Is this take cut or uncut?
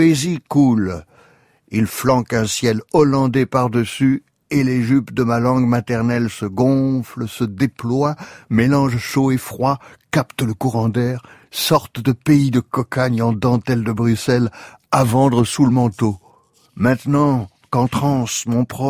uncut